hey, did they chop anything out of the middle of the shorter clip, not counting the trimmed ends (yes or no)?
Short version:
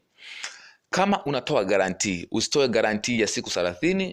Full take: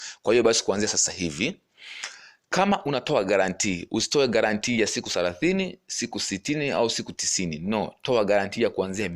no